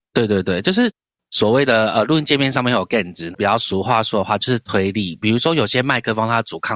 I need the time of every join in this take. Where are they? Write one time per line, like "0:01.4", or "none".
0:03.3